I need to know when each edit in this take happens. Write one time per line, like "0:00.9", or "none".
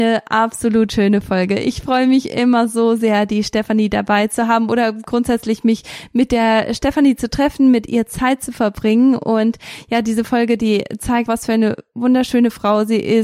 0:11.3